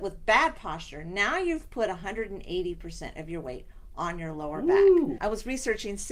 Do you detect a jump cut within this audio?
yes; 1 cut; at 5.2 s

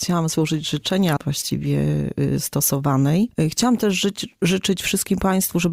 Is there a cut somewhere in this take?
yes; 1 cut; at 1.2 s

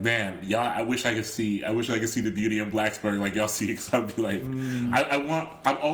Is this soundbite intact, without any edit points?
yes; 0 cuts

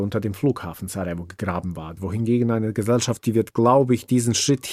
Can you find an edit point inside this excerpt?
yes; 2 cuts; at 2.0 s, 3.2 s

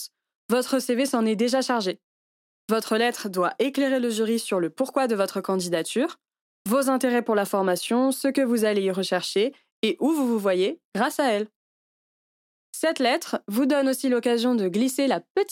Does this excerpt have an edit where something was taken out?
no; 0 cuts

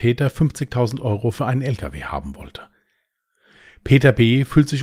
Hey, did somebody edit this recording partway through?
no; 0 cuts

